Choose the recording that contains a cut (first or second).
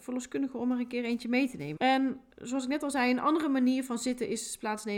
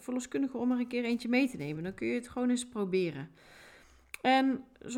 first